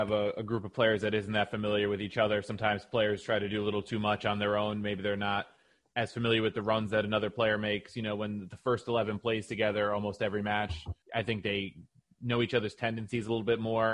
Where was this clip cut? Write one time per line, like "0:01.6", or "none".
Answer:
0:11.0